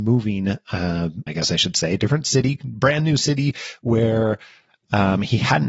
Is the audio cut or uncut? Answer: cut